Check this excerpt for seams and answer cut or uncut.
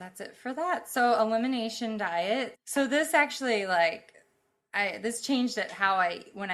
cut